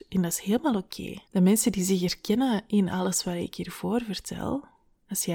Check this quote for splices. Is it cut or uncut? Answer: cut